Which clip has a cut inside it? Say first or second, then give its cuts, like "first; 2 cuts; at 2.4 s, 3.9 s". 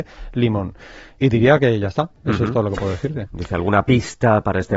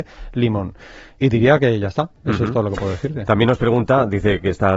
first; 1 cut; at 3.3 s